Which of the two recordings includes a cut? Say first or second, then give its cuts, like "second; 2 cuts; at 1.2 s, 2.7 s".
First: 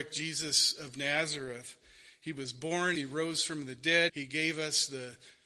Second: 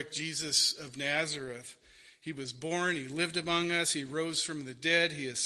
first; 2 cuts; at 3.0 s, 4.1 s